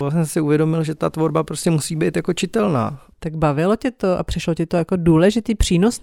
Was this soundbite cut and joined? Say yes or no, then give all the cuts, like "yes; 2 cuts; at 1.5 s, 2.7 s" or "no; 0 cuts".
yes; 1 cut; at 3.1 s